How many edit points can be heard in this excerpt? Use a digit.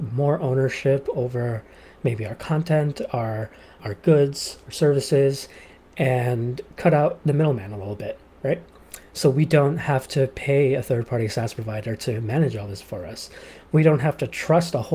0